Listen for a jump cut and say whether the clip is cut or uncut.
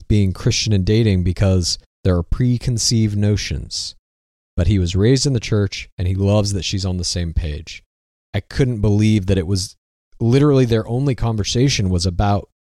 uncut